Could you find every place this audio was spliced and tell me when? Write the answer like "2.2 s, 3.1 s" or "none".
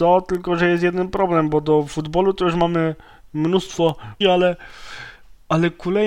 4.2 s